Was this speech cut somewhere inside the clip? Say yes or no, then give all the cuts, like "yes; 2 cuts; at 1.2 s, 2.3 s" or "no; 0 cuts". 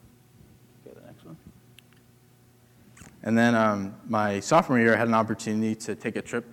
no; 0 cuts